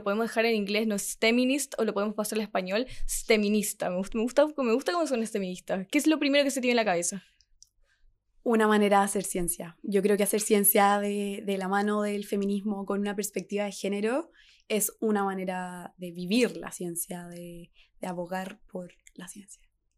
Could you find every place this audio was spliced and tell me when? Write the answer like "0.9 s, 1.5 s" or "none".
none